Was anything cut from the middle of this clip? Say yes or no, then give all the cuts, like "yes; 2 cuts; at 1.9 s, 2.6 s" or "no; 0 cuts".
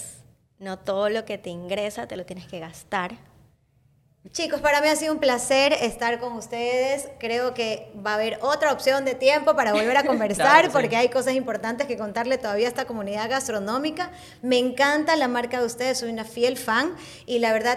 yes; 1 cut; at 4.3 s